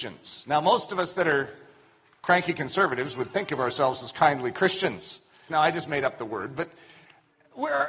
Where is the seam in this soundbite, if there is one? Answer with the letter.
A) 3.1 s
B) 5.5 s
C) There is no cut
B